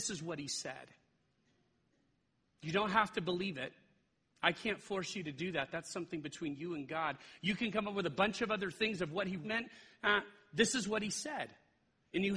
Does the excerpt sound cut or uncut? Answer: cut